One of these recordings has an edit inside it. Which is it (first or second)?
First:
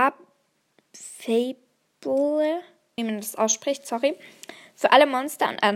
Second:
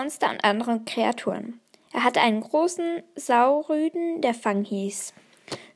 first